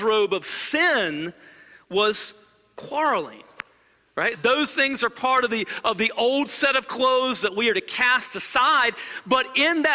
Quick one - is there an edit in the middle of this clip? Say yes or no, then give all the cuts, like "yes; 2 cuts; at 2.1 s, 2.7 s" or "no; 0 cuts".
yes; 1 cut; at 4.3 s